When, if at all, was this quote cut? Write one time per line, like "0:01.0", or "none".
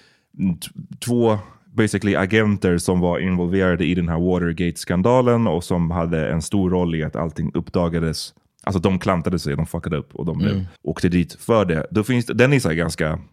0:10.8